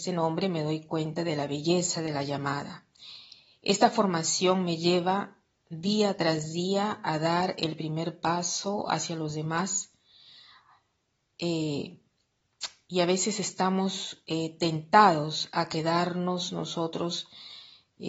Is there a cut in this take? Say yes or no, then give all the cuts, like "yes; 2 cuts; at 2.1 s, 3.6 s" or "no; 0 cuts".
no; 0 cuts